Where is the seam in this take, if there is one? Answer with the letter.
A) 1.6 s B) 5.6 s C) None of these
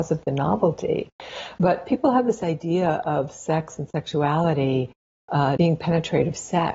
B